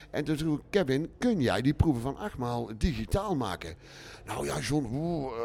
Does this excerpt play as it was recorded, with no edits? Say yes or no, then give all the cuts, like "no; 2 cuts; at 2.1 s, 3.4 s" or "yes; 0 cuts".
yes; 0 cuts